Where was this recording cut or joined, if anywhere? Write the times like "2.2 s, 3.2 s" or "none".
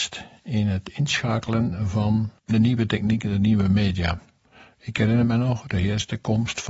2.4 s

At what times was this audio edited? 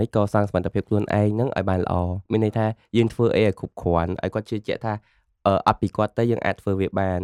2.3 s

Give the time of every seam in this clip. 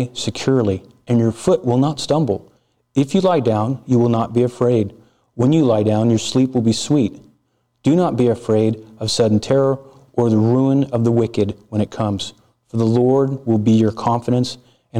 none

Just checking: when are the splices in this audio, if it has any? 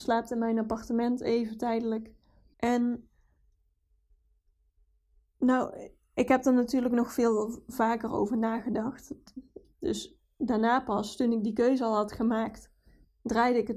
2.5 s, 9.6 s

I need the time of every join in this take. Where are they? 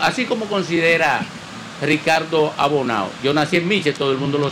none

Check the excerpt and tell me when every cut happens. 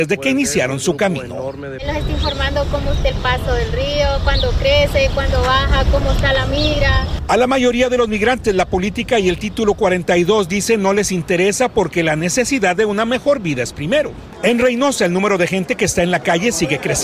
none

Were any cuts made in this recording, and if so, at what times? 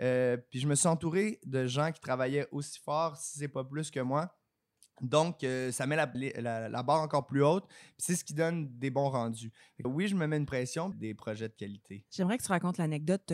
6.1 s, 9.8 s, 10.9 s

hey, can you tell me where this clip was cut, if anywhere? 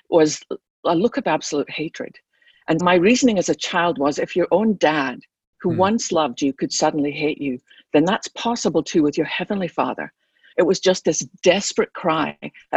2.8 s, 10.5 s

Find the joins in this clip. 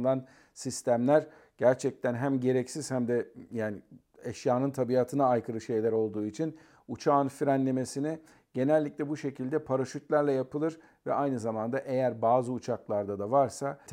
none

